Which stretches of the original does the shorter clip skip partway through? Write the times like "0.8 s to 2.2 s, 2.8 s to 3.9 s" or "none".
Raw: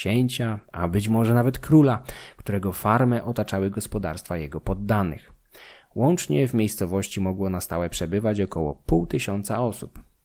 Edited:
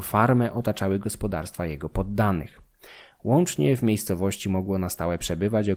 none